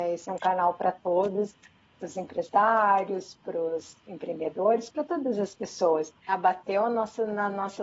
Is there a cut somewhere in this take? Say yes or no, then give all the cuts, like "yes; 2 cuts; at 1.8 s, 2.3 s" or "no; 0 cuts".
yes; 1 cut; at 6.3 s